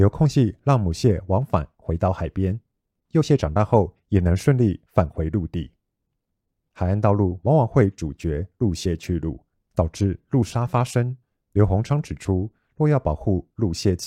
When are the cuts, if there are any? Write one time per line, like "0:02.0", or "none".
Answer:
0:06.7